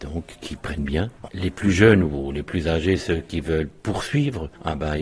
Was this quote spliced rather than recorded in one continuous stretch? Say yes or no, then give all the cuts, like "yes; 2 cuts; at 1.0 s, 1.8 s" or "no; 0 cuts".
yes; 1 cut; at 1.3 s